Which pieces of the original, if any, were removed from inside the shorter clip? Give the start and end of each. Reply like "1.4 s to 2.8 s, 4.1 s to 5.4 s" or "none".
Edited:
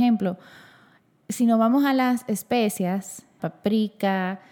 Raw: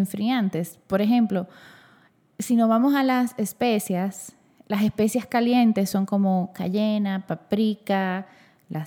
4.5 s to 7.3 s